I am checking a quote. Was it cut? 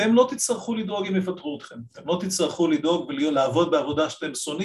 no; 0 cuts

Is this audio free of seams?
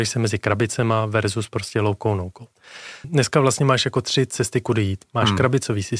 no; 1 cut; at 3.0 s

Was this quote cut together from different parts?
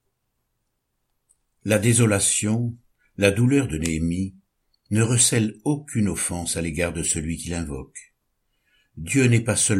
no; 0 cuts

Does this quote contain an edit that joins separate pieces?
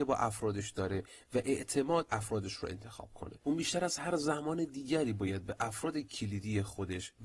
yes; 1 cut; at 3.4 s

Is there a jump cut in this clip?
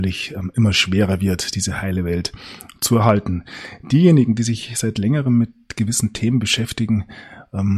no; 0 cuts

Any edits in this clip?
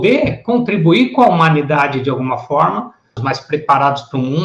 yes; 1 cut; at 3.2 s

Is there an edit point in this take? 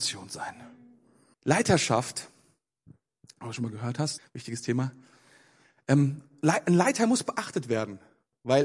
yes; 2 cuts; at 1.3 s, 4.2 s

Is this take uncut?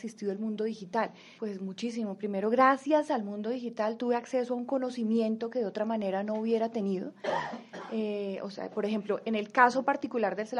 no; 1 cut; at 1.4 s

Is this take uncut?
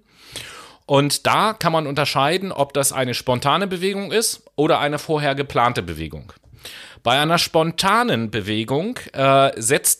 yes; 0 cuts

